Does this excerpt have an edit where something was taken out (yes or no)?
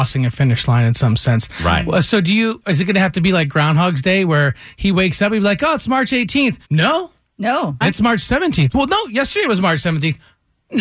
yes